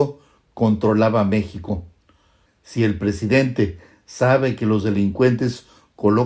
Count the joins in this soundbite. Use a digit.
1